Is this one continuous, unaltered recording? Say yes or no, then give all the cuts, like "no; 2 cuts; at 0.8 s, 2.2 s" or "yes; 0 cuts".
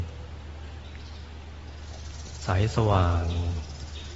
yes; 0 cuts